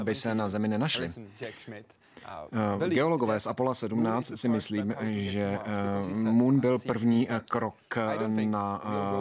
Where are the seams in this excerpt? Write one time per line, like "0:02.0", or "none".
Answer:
none